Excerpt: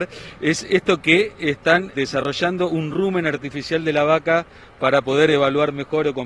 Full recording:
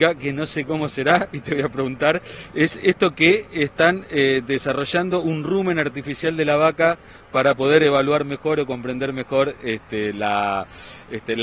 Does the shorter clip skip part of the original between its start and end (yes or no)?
yes